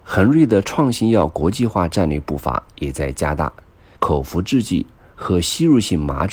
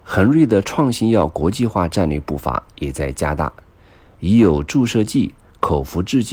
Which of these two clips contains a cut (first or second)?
first